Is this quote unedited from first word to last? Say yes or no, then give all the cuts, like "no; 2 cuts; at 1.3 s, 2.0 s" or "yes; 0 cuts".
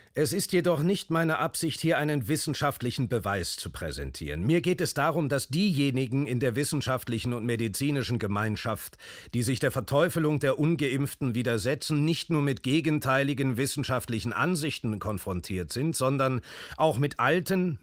yes; 0 cuts